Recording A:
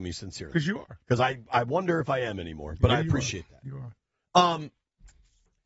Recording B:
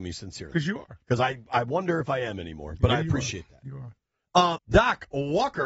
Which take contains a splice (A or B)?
B